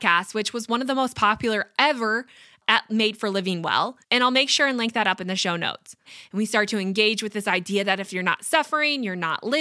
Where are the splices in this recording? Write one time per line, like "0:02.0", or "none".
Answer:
0:04.0
0:06.0